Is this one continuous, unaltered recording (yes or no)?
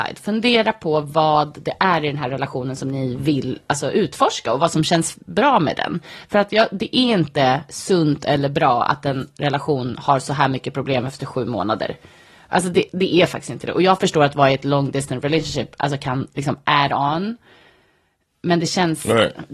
yes